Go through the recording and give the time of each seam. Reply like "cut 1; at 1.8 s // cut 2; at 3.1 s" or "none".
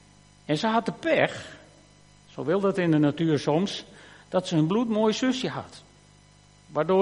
none